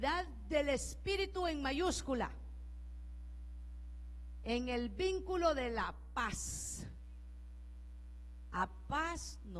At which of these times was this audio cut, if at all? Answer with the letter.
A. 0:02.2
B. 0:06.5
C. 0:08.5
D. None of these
D